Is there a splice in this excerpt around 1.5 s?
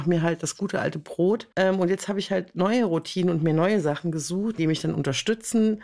yes; 2 cuts; at 1.5 s, 4.6 s

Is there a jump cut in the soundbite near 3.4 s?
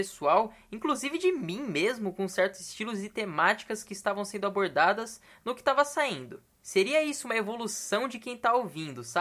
no; 1 cut; at 6.6 s

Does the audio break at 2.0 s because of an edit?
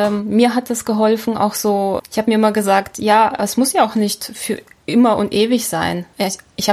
yes; 1 cut; at 2.0 s

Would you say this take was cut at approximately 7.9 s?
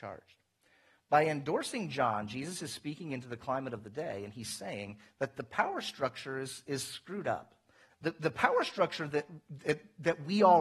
yes; 1 cut; at 7.9 s

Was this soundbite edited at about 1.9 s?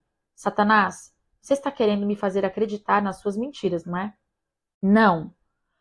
no; 1 cut; at 4.7 s

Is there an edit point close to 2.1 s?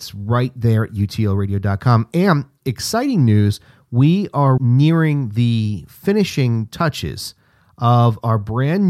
no; 1 cut; at 4.6 s

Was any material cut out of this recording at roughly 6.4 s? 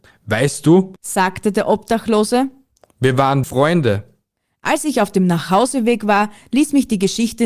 no; 1 cut; at 3.4 s

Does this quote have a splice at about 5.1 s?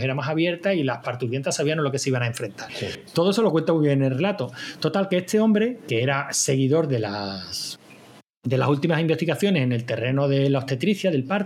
no; 1 cut; at 2.7 s

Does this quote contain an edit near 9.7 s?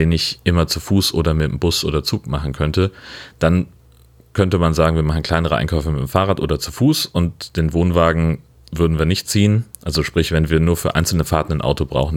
yes; 1 cut; at 9.7 s

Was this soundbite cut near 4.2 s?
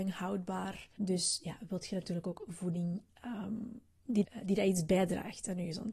yes; 2 cuts; at 1.0 s, 4.2 s

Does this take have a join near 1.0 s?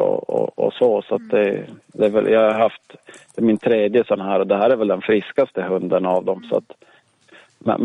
no; 0 cuts

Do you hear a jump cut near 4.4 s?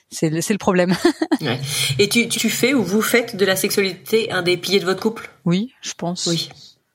no; 1 cut; at 2.3 s

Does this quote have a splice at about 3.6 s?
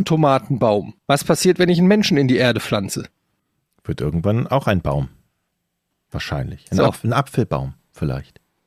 no; 1 cut; at 1.0 s

